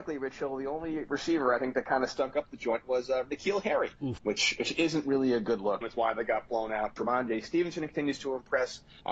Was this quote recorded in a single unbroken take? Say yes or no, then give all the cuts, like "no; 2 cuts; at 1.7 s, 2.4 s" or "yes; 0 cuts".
no; 3 cuts; at 4.2 s, 5.8 s, 7.0 s